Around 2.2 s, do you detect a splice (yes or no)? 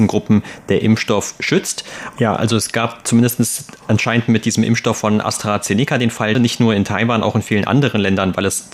yes